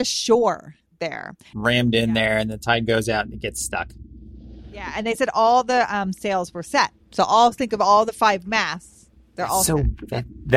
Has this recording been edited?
yes; 2 cuts; at 1.5 s, 7.0 s

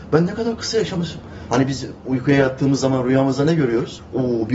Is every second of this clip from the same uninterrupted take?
no; 1 cut; at 1.5 s

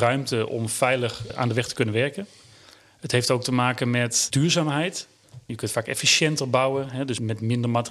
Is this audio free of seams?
no; 2 cuts; at 1.3 s, 5.5 s

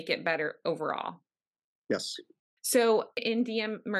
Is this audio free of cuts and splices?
yes; 0 cuts

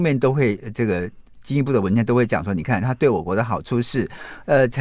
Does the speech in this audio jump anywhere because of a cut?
no; 0 cuts

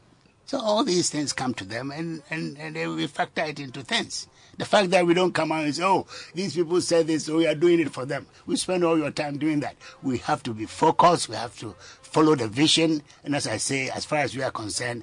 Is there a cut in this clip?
no; 0 cuts

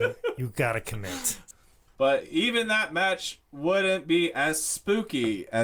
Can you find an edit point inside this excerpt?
yes; 1 cut; at 1.9 s

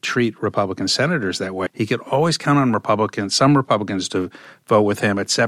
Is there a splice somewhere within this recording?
yes; 1 cut; at 1.7 s

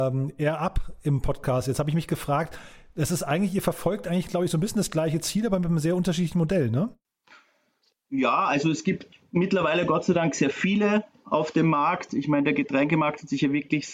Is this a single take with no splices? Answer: yes; 0 cuts

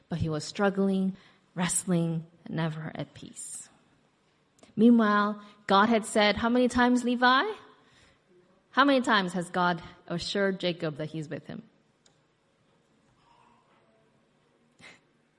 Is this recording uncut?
yes; 0 cuts

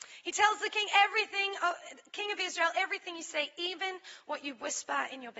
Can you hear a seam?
no; 0 cuts

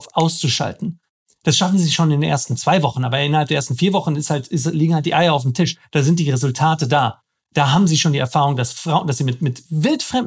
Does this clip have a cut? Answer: no; 0 cuts

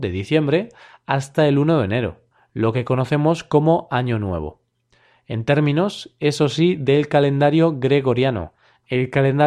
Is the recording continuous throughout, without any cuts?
yes; 0 cuts

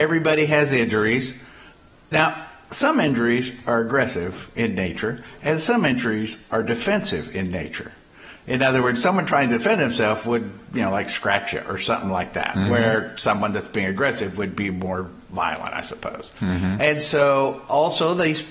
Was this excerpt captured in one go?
yes; 0 cuts

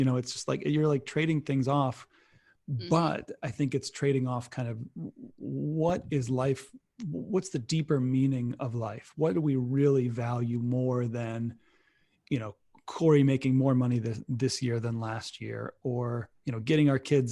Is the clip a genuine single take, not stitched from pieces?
yes; 0 cuts

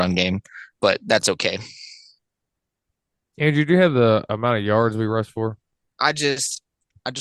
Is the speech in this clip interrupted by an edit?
yes; 1 cut; at 5.9 s

